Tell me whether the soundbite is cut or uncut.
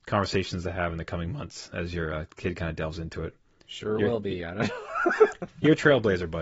uncut